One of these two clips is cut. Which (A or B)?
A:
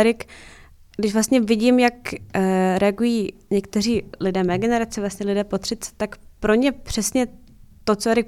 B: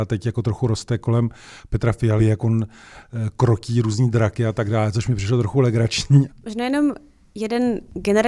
B